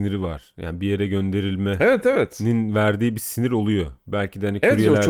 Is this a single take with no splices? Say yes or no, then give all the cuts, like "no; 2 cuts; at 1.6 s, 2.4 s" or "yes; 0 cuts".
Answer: yes; 0 cuts